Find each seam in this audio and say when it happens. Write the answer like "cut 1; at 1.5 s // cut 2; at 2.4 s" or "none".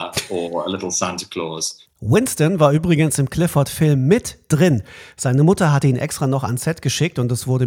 cut 1; at 1.9 s